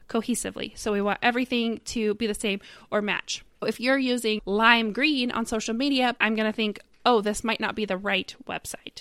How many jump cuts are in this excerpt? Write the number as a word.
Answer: two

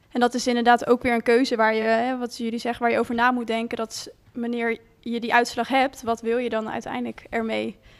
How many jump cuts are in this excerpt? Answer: zero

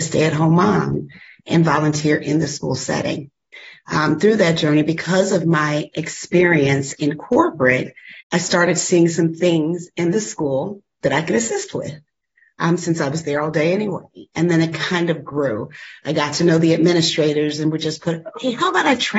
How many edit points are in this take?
one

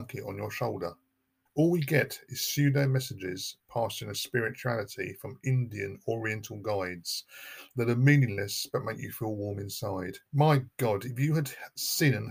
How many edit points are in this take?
two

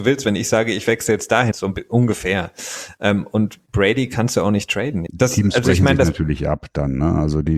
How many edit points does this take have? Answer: two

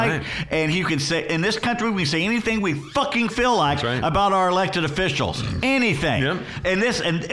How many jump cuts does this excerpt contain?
zero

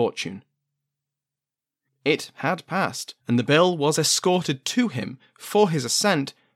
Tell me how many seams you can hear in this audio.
two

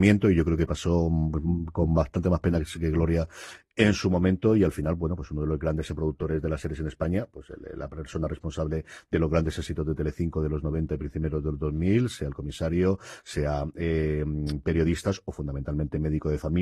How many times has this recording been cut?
zero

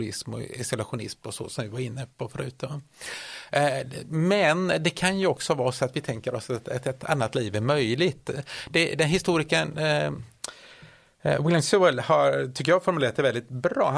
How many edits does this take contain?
zero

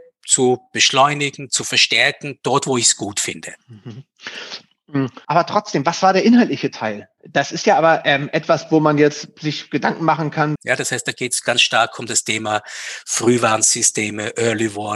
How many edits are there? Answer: three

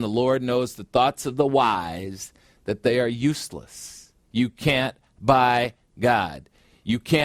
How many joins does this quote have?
one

